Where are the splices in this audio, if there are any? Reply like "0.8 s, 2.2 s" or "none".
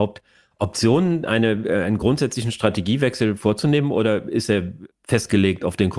none